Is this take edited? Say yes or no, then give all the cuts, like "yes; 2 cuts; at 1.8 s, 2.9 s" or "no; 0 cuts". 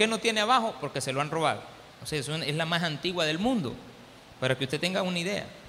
yes; 1 cut; at 1.9 s